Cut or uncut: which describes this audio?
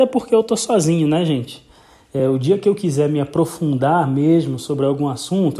uncut